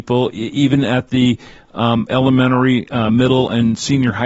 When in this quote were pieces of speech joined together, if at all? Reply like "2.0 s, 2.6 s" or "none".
none